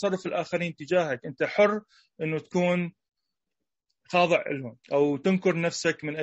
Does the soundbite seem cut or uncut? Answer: cut